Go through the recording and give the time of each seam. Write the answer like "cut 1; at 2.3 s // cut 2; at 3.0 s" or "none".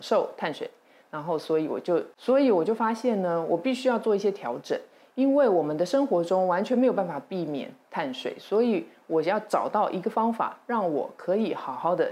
cut 1; at 2.1 s